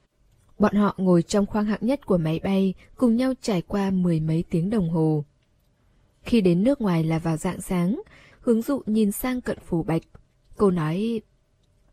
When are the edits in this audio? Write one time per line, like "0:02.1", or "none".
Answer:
0:08.3